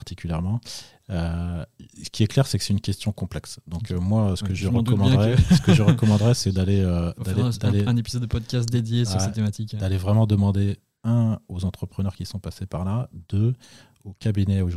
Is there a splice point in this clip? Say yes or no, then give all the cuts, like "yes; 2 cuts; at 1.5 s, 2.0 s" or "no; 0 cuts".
no; 0 cuts